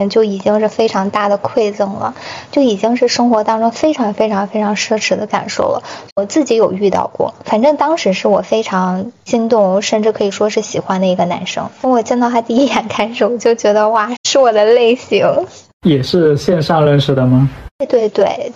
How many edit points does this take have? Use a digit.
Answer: 1